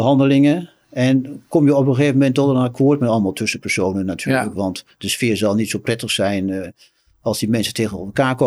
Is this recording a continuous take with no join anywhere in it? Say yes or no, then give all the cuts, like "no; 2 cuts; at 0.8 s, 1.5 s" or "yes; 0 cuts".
yes; 0 cuts